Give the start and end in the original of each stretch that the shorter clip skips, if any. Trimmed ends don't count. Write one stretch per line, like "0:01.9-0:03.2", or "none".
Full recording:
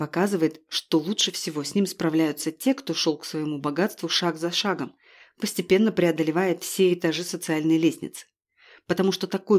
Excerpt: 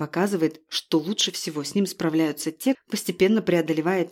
0:02.7-0:05.2